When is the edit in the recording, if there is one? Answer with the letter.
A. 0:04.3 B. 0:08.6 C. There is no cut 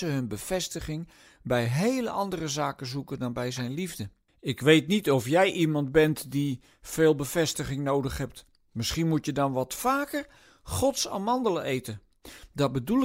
A